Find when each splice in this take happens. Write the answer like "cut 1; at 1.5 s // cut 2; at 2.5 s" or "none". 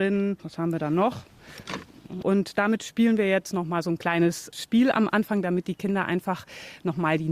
cut 1; at 2.2 s